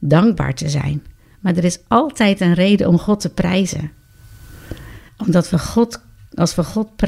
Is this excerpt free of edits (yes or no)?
no